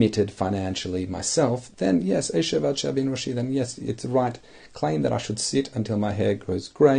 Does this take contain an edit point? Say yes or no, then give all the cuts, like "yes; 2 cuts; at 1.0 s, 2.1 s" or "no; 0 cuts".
no; 0 cuts